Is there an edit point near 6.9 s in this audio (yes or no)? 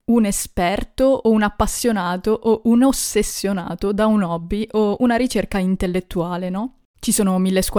no